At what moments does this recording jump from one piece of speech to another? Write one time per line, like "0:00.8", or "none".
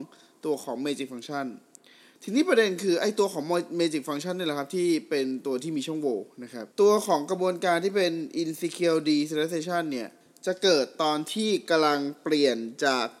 0:06.7

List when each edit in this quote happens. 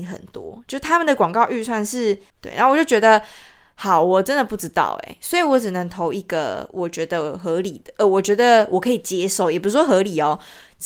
0:02.3

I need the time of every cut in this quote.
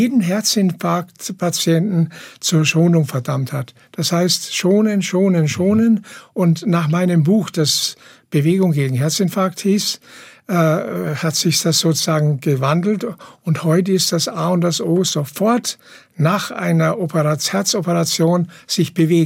none

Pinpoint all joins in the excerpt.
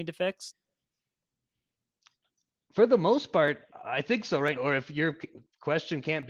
0:04.6

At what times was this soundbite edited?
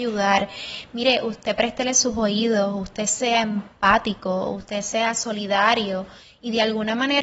none

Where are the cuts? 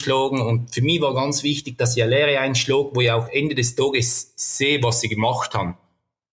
none

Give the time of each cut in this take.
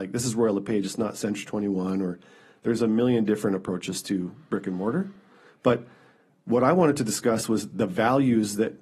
none

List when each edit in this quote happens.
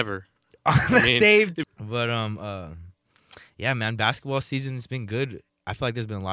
0:01.6

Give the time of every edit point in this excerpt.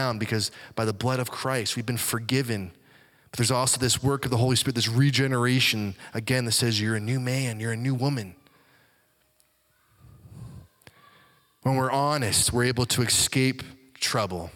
none

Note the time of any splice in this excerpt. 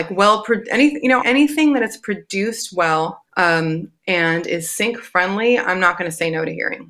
0:01.2
0:03.3

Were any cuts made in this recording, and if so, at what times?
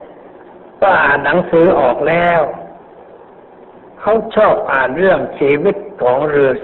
none

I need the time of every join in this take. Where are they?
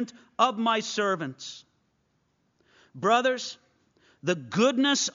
none

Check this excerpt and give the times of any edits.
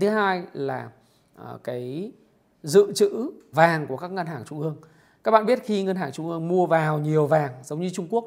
0:03.5

